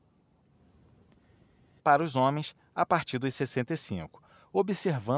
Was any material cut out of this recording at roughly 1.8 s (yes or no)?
yes